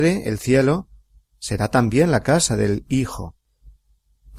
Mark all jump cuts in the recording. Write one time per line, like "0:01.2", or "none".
none